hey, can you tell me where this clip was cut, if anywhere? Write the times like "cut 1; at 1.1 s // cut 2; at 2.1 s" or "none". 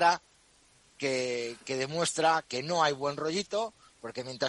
cut 1; at 2.4 s